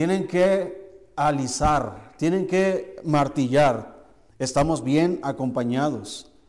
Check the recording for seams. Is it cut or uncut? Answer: cut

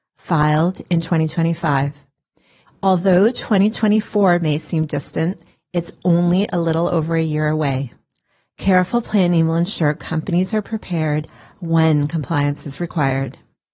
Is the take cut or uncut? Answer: cut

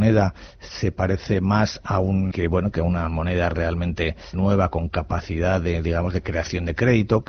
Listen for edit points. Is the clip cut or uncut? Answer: cut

